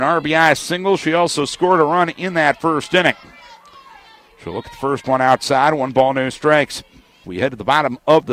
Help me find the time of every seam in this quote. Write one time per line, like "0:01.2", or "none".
0:07.2